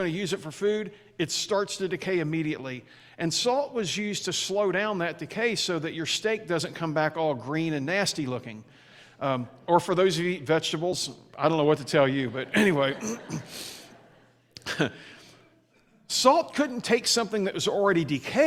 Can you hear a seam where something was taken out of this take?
no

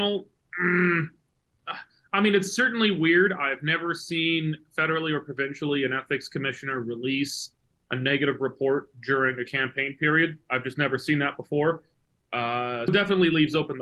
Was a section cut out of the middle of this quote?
yes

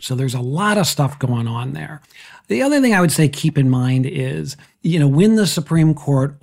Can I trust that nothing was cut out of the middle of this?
yes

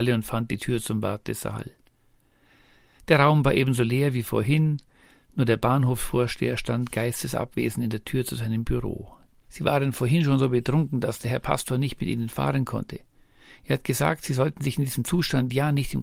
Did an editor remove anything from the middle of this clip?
yes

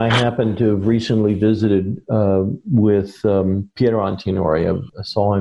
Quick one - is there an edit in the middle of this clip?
no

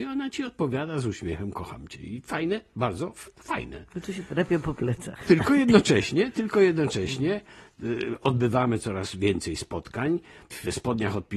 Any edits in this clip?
no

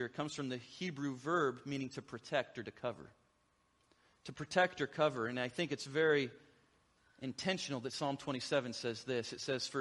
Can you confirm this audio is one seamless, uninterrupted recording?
yes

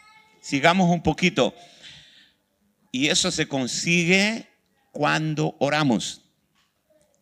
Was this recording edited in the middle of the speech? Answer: yes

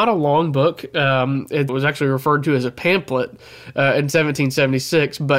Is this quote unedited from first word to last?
no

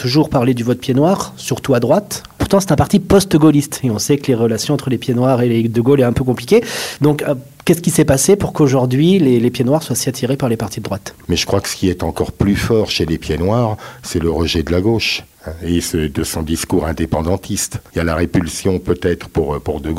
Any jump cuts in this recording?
yes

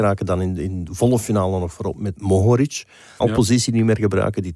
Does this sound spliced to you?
yes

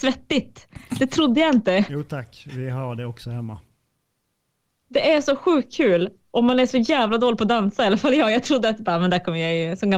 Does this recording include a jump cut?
no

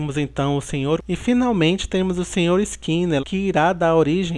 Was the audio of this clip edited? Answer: yes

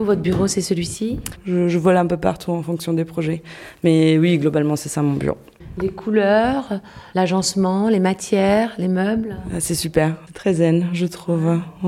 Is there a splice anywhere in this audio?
no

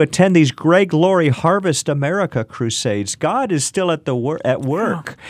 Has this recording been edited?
no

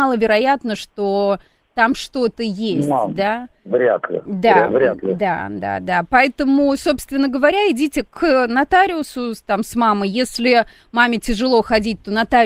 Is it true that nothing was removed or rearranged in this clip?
yes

